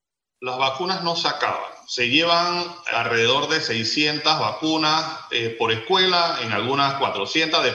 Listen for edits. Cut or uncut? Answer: cut